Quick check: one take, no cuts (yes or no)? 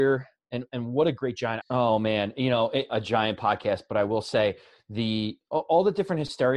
no